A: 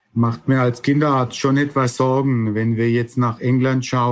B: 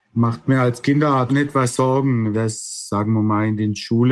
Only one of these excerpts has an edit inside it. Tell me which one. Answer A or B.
B